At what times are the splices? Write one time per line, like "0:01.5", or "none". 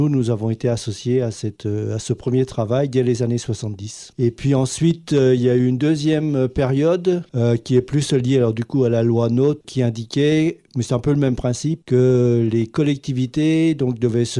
none